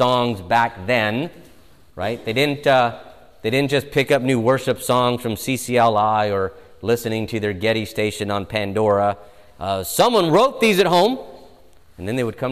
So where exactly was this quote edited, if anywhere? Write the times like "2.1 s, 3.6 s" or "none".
none